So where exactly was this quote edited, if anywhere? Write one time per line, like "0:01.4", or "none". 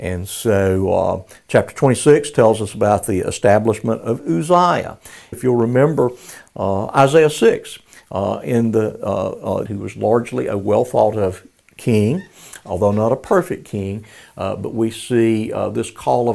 0:05.3
0:09.7